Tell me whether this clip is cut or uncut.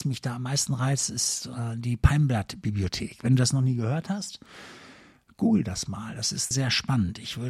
cut